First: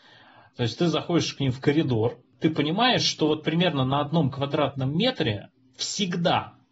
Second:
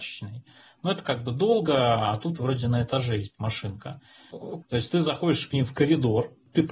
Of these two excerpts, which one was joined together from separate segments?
second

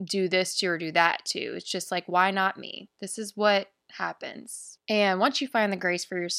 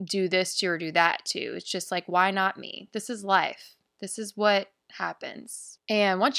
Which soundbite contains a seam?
first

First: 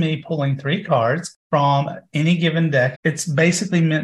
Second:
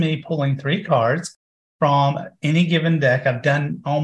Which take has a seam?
first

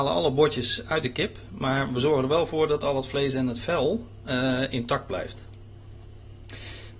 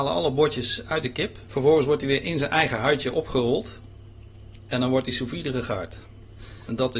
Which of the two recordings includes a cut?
second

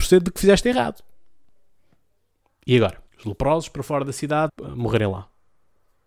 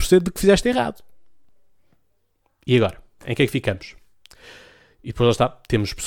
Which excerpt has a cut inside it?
first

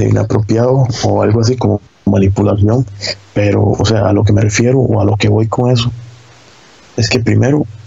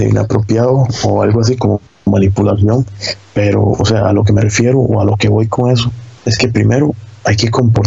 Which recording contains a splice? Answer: second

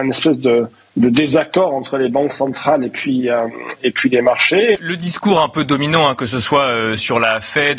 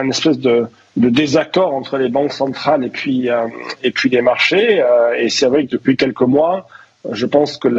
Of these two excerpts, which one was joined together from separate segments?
first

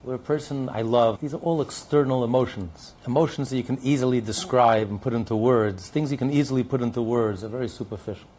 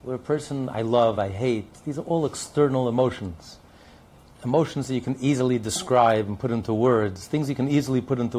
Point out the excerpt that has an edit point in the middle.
first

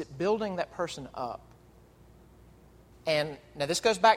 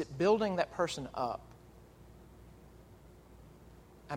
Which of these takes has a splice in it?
first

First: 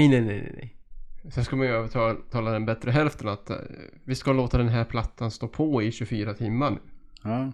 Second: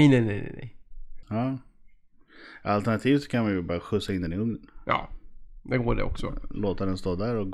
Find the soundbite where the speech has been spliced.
second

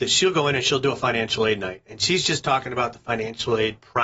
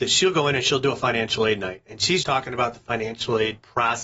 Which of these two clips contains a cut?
second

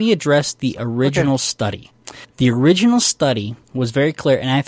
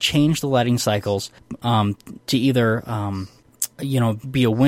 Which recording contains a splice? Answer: second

